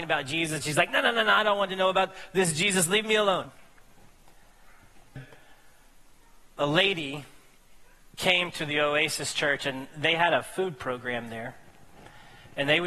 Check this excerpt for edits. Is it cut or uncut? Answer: cut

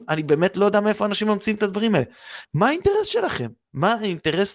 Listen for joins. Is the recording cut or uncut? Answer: cut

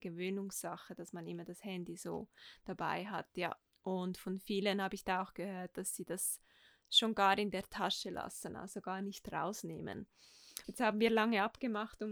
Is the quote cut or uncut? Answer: cut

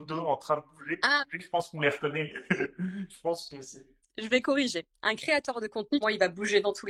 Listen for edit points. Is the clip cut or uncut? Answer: cut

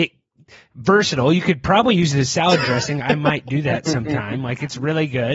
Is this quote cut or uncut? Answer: uncut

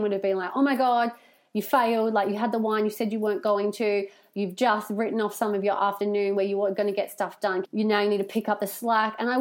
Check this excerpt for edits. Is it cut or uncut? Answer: cut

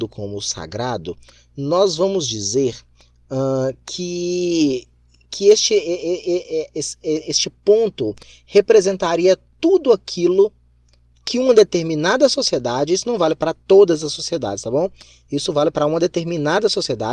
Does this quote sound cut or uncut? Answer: uncut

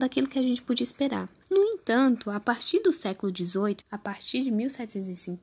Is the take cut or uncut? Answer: cut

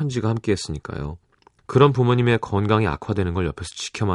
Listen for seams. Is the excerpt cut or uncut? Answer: cut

